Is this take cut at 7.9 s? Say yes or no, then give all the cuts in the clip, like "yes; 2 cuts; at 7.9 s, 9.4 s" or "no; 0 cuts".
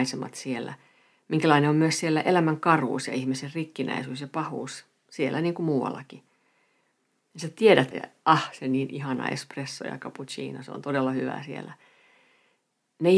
yes; 1 cut; at 7.9 s